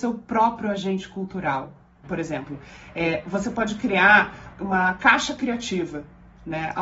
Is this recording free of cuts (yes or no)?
no